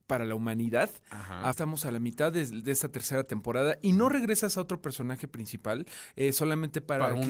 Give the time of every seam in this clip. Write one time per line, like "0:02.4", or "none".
0:01.5